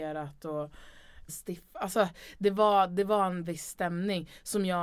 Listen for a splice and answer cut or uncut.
cut